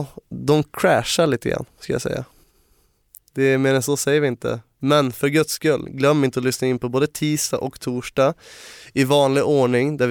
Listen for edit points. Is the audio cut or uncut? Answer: uncut